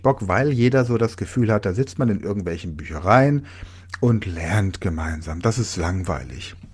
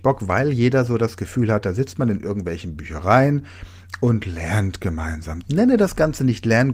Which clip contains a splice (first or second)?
second